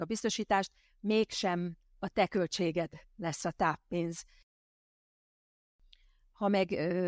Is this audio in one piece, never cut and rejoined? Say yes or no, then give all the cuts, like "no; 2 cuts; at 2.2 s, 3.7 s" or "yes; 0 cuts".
yes; 0 cuts